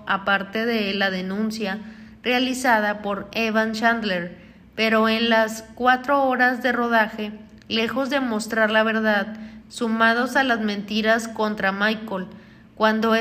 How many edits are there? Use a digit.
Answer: 1